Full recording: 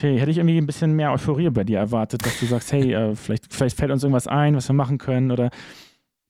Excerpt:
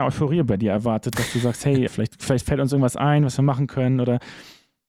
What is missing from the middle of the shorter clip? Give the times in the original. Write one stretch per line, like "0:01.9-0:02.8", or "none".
0:02.9-0:03.2